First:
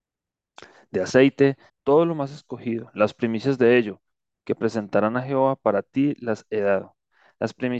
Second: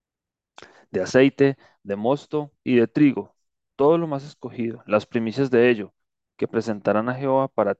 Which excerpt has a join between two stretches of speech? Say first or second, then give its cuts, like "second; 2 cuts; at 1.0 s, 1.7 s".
first; 1 cut; at 1.7 s